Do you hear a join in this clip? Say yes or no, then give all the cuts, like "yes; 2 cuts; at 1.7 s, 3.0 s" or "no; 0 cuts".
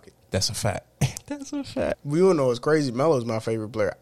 yes; 1 cut; at 1.9 s